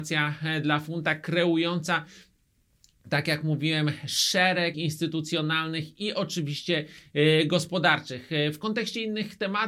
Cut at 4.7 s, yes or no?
yes